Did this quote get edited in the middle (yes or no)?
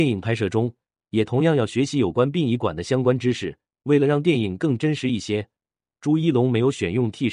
yes